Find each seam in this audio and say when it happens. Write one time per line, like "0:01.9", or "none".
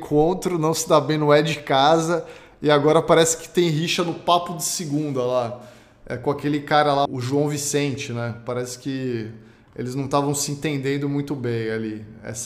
0:07.1